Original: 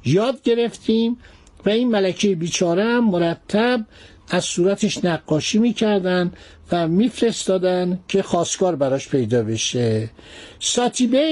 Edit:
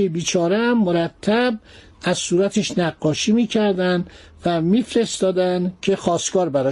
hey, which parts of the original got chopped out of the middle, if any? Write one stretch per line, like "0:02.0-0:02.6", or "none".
none